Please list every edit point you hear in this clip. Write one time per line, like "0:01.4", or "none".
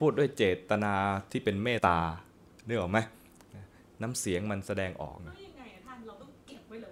0:01.8
0:05.2